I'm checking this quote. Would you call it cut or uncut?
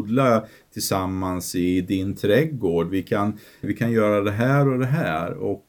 cut